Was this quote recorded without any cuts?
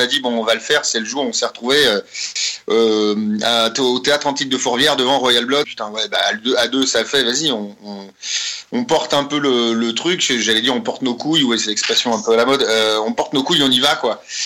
no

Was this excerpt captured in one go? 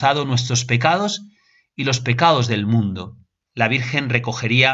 no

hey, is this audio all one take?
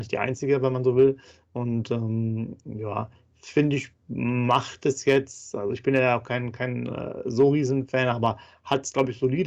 yes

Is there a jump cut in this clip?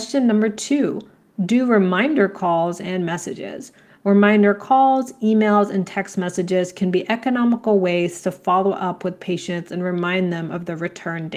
no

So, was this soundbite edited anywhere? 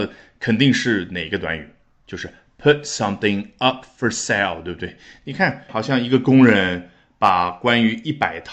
yes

